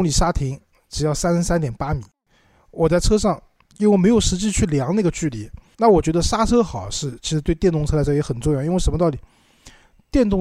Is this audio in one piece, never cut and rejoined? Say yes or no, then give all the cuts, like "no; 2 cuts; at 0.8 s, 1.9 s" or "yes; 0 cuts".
no; 1 cut; at 5.7 s